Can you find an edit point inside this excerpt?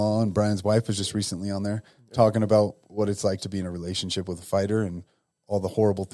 no; 0 cuts

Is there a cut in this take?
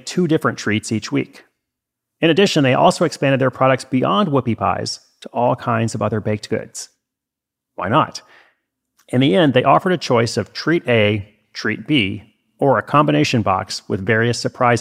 no; 0 cuts

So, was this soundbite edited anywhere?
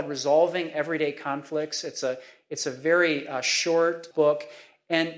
yes; 1 cut; at 4.1 s

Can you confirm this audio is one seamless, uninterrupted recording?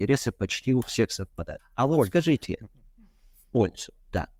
no; 1 cut; at 1.6 s

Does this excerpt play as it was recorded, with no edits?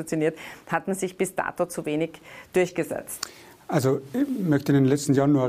yes; 0 cuts

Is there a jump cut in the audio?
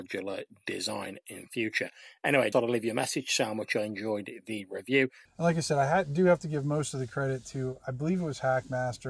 yes; 2 cuts; at 2.5 s, 5.3 s

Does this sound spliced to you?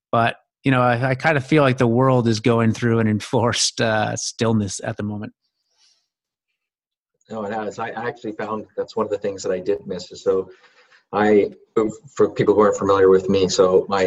no; 0 cuts

